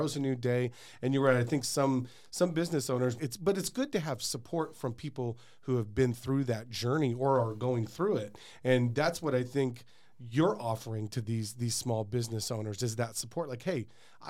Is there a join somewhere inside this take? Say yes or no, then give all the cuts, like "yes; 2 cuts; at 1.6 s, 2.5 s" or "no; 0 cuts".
yes; 1 cut; at 3.2 s